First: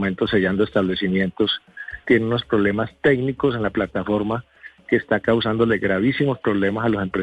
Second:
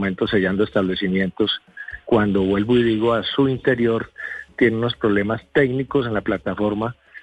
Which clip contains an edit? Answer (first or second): first